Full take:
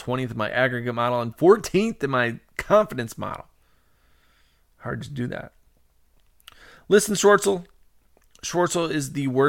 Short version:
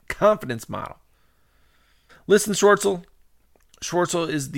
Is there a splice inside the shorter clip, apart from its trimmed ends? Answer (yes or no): yes